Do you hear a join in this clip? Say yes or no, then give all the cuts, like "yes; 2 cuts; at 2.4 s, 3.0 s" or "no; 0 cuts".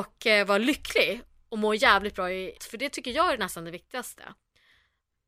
yes; 1 cut; at 2.6 s